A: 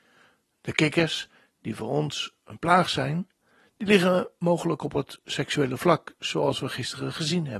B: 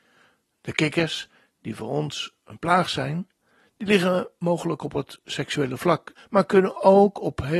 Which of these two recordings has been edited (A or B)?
B